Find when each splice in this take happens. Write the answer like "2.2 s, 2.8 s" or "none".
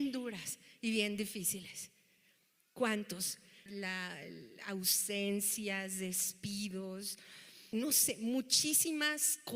3.7 s, 7.7 s